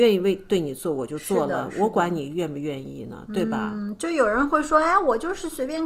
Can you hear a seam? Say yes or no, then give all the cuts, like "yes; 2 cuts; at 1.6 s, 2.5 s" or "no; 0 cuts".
no; 0 cuts